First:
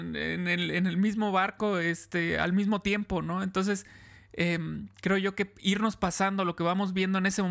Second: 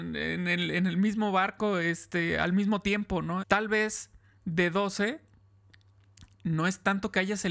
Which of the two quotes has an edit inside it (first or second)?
second